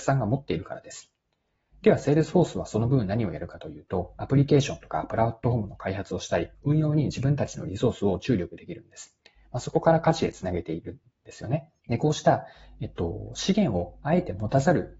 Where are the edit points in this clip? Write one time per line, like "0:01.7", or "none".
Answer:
0:11.8